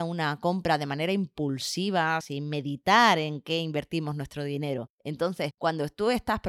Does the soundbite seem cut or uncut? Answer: cut